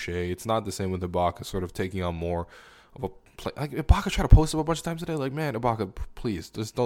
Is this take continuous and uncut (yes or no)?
yes